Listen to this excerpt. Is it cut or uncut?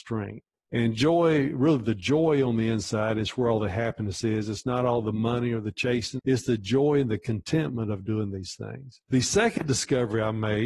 cut